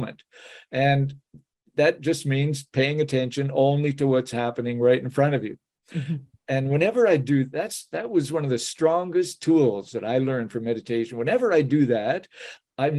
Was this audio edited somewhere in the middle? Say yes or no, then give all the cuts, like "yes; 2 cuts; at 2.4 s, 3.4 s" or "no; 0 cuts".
no; 0 cuts